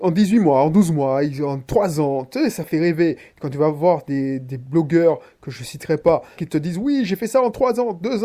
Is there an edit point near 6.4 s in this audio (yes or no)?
yes